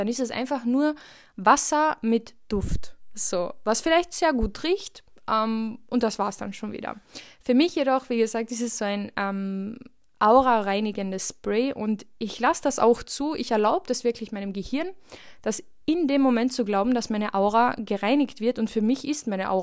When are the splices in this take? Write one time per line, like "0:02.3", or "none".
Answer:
none